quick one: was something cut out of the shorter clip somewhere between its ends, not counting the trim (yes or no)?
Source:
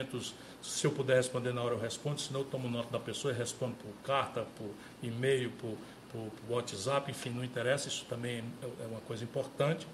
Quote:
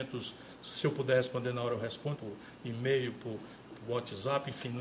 yes